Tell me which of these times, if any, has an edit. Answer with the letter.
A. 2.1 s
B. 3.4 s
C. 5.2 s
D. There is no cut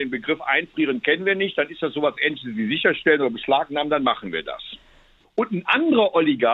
C